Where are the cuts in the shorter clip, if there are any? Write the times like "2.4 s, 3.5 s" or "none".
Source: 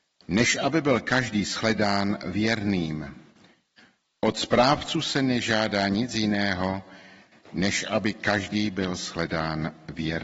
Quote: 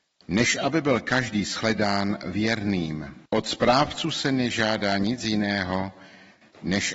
3.3 s